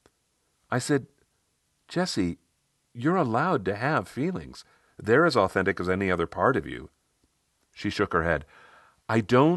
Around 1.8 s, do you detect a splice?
no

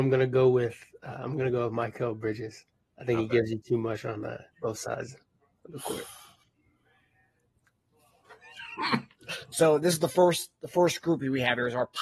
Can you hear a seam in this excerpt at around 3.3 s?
no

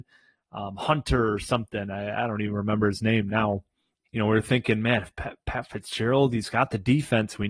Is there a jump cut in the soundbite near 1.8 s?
no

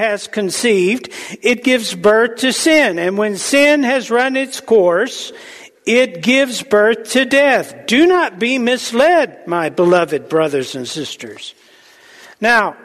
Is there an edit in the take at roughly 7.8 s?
no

